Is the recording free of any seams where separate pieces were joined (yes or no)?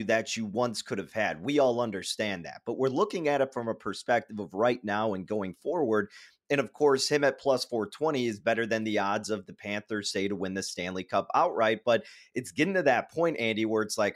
yes